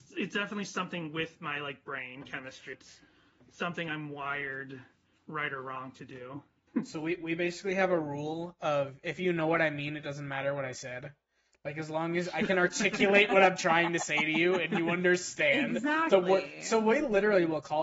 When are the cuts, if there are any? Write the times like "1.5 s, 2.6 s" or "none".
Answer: 2.7 s, 6.7 s